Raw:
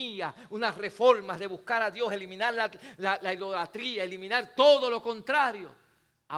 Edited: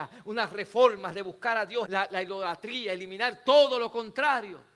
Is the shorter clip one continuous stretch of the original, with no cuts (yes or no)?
no